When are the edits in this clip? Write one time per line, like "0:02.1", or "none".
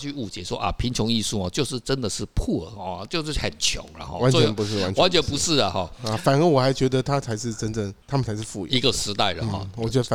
0:08.0